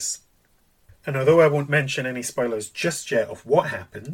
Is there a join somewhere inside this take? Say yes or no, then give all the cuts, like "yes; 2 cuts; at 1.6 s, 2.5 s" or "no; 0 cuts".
no; 0 cuts